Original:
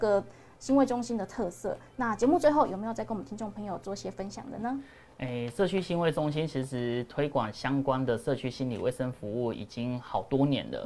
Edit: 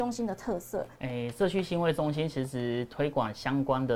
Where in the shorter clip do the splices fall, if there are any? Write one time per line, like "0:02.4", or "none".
0:00.9